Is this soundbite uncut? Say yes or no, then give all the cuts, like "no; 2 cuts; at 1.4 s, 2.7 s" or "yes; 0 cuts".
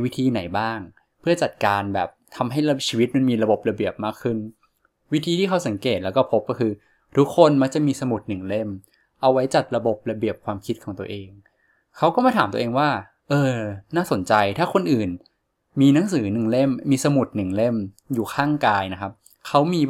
yes; 0 cuts